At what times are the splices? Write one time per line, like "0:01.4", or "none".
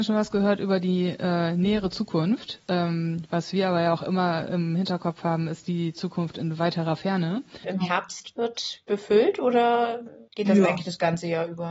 0:07.6
0:10.3